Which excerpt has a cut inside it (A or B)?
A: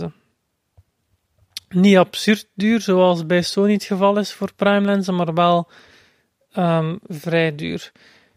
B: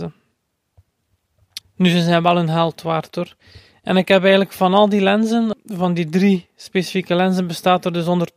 B